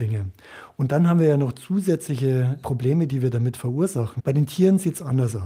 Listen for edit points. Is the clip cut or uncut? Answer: cut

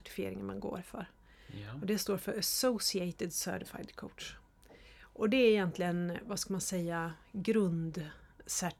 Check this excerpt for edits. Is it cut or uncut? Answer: uncut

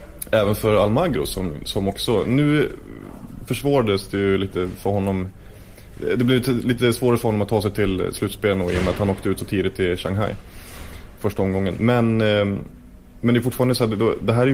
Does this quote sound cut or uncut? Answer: uncut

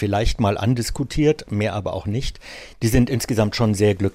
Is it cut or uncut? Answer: cut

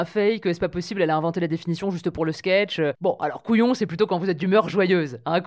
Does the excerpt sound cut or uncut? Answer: cut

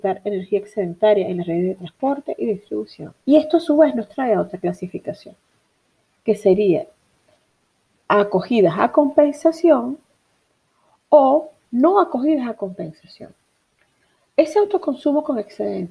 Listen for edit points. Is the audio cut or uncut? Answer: cut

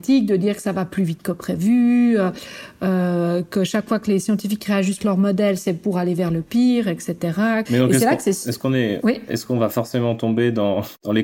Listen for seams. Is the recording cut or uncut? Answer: cut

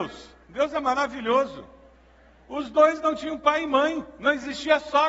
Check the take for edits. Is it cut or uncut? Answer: uncut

